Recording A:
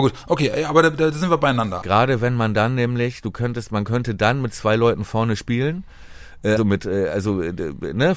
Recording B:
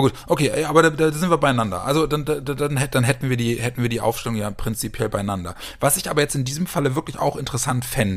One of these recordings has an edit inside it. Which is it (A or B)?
A